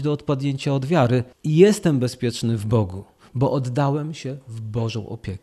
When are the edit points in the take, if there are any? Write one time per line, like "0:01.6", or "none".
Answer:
0:01.3